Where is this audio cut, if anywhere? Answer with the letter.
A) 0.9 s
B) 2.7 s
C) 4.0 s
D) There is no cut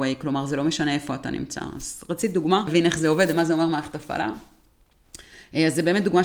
B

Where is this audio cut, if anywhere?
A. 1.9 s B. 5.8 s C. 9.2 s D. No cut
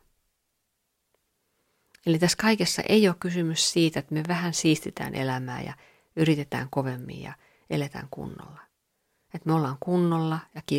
C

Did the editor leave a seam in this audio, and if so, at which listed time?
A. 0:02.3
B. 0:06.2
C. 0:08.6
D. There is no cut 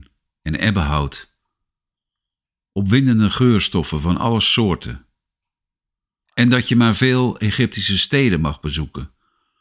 B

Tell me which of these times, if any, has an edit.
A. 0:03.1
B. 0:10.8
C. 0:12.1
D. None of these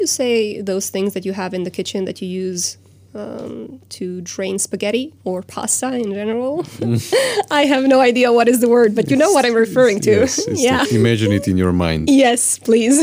B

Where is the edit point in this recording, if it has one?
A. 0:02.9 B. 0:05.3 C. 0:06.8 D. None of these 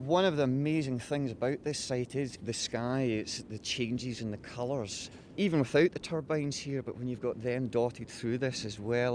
B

